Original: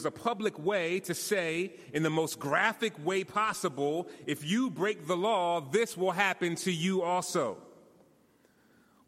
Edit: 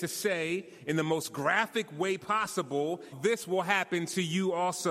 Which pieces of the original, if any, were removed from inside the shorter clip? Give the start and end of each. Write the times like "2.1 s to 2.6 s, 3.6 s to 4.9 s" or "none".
4.2 s to 5.6 s